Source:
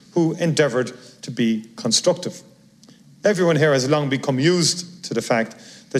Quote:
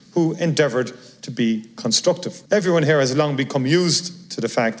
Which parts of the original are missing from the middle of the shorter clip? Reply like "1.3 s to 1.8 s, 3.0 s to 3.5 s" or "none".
2.5 s to 3.2 s